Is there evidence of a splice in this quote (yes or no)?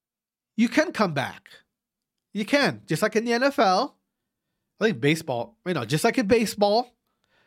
no